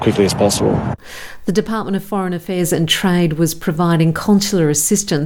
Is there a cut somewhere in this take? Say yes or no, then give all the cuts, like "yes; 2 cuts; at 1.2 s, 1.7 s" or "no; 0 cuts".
no; 0 cuts